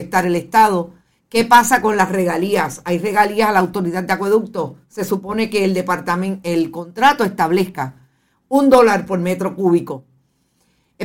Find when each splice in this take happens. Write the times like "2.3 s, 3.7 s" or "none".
none